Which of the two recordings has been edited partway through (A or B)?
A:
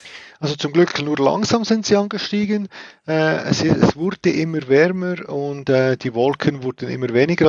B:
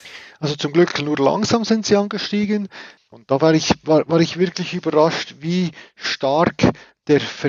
B